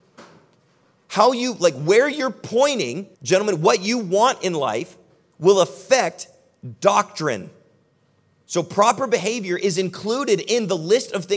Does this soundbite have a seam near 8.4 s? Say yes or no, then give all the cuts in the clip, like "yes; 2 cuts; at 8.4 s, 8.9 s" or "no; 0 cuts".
no; 1 cut; at 3.1 s